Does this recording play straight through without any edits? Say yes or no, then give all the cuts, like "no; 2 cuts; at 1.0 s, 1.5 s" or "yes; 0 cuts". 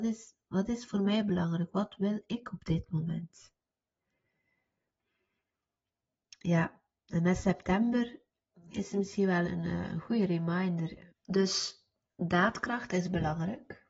no; 2 cuts; at 9.4 s, 11.1 s